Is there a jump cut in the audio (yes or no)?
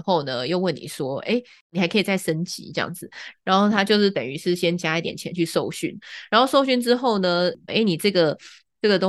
yes